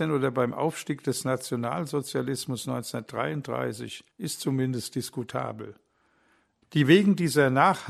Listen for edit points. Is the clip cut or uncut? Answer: cut